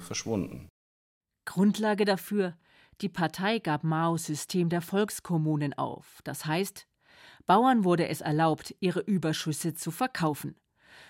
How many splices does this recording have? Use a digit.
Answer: 0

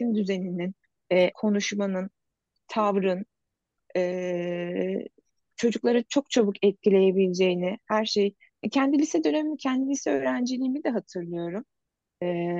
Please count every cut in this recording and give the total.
1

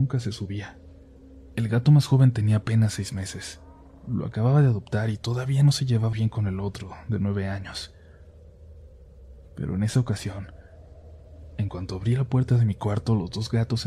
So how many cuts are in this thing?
1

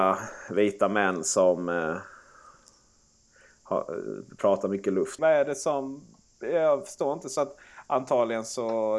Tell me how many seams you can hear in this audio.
1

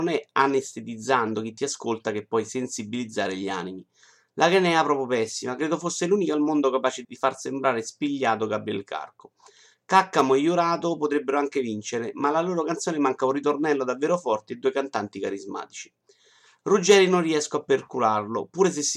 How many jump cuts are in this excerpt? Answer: 1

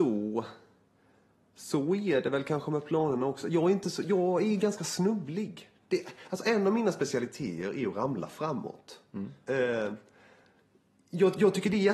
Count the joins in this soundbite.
0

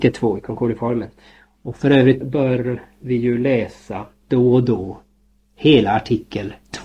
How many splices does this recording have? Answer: 1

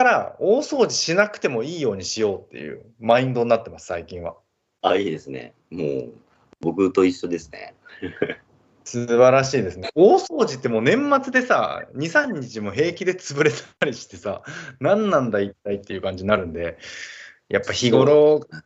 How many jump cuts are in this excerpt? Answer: 0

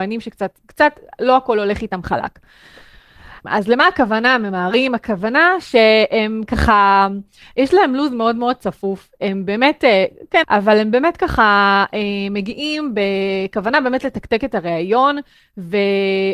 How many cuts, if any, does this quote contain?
2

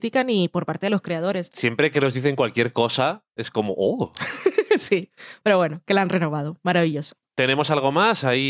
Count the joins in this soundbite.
1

